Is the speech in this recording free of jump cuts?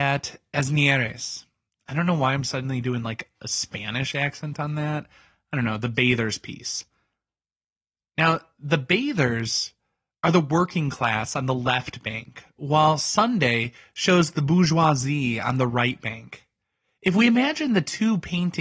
yes; 0 cuts

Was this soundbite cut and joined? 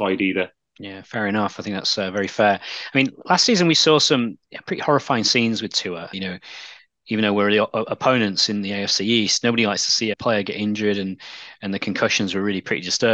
yes; 2 cuts; at 6.1 s, 10.1 s

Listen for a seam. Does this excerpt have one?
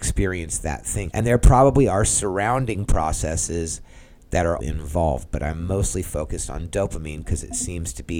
yes; 2 cuts; at 1.1 s, 4.6 s

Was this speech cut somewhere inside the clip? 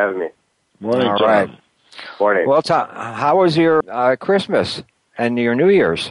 yes; 1 cut; at 3.8 s

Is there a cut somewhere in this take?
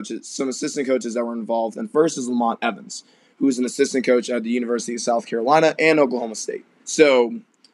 yes; 1 cut; at 6.8 s

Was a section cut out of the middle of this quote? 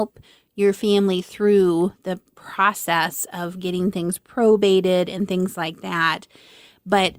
no; 0 cuts

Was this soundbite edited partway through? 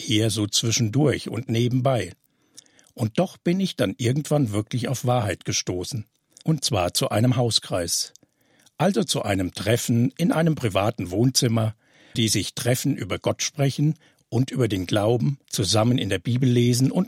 yes; 3 cuts; at 6.4 s, 12.1 s, 15.4 s

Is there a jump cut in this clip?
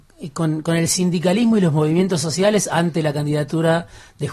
no; 0 cuts

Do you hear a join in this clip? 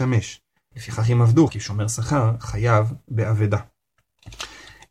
yes; 1 cut; at 1.5 s

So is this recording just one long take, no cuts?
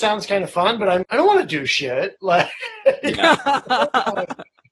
no; 1 cut; at 1.0 s

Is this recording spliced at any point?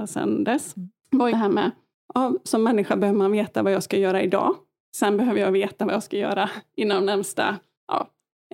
yes; 1 cut; at 1.3 s

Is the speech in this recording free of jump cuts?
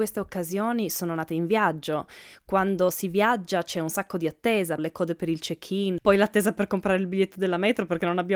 no; 2 cuts; at 4.8 s, 6.0 s

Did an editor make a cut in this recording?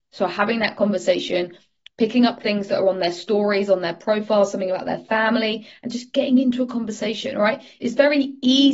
no; 0 cuts

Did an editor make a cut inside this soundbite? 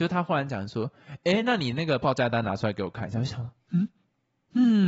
no; 0 cuts

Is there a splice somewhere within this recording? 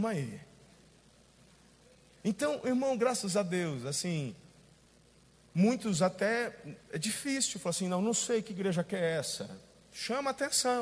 no; 0 cuts

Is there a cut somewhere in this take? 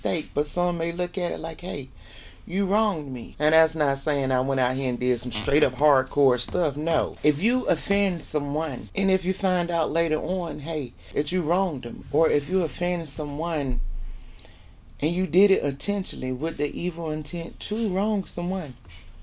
yes; 1 cut; at 3.3 s

